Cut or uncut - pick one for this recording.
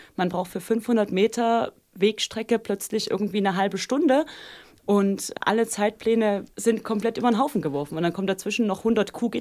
uncut